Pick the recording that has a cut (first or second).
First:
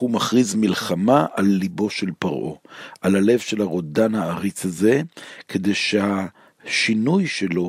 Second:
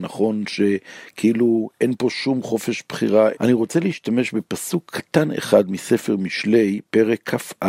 second